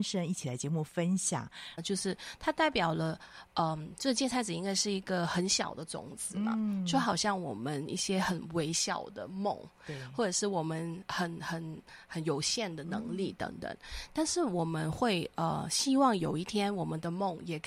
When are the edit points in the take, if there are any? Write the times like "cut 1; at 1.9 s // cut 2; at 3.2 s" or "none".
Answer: cut 1; at 1.8 s